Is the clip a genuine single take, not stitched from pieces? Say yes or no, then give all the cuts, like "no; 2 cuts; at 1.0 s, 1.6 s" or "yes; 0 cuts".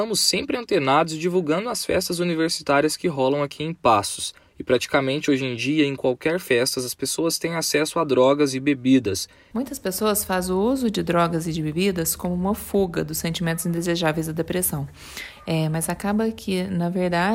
no; 1 cut; at 9.5 s